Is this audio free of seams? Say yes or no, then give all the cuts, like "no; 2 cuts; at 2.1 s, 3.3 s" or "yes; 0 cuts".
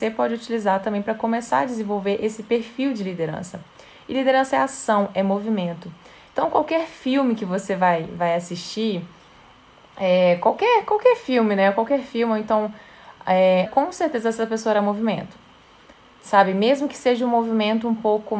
no; 1 cut; at 13.7 s